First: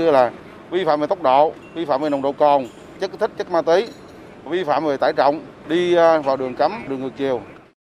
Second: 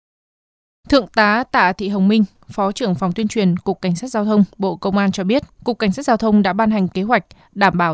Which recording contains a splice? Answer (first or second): second